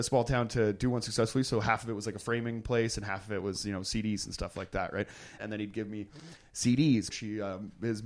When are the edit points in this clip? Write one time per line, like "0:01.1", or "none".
0:05.4
0:07.1